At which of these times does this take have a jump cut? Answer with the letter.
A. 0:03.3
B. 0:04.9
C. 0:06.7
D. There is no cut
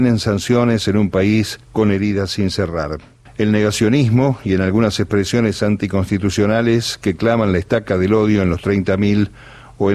A